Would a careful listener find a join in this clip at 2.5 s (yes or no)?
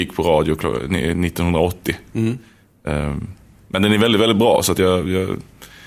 no